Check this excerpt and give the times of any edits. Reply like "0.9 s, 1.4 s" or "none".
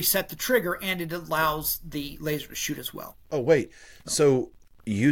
3.2 s